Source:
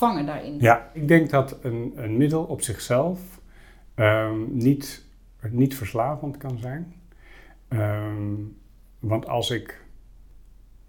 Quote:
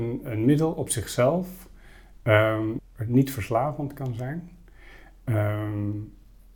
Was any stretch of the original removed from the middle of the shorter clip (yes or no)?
yes